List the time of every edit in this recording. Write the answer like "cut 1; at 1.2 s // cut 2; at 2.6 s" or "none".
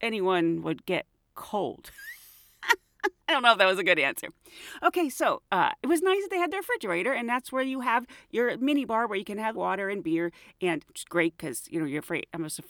cut 1; at 9.5 s // cut 2; at 10.9 s